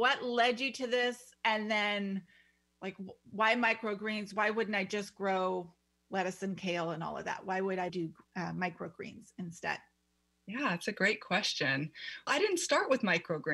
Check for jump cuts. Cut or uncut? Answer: cut